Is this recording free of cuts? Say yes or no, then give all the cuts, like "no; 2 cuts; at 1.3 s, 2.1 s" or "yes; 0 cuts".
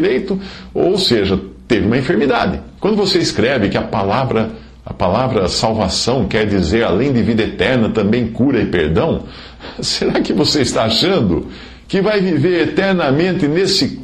no; 1 cut; at 2.8 s